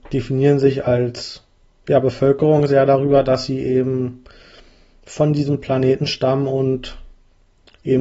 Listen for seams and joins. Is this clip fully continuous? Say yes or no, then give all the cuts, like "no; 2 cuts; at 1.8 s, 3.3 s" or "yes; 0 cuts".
yes; 0 cuts